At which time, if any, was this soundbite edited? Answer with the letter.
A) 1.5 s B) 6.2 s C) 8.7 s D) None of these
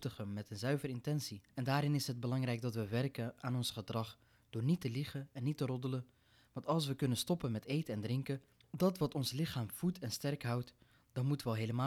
A